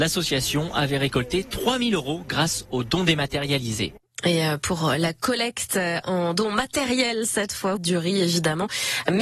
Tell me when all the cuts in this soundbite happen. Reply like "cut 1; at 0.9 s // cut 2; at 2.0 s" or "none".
cut 1; at 7.8 s